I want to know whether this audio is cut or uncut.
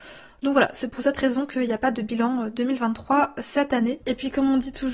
cut